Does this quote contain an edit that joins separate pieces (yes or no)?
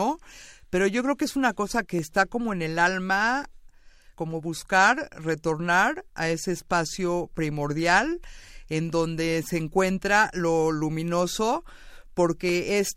yes